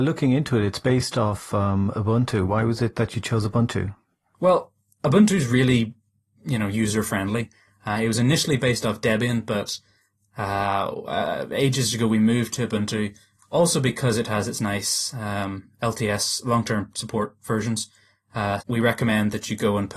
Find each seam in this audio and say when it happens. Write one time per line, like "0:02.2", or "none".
0:18.6